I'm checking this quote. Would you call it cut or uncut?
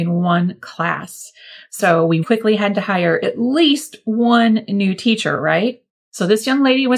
cut